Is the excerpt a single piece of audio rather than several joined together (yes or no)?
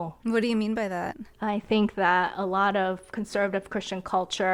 yes